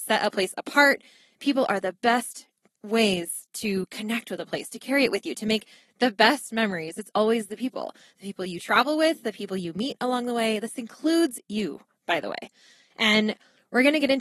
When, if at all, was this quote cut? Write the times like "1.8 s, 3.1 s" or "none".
none